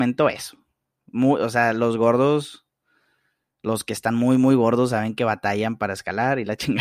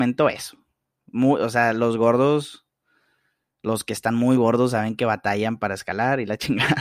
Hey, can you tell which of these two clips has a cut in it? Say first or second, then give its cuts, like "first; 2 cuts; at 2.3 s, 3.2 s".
second; 1 cut; at 4.4 s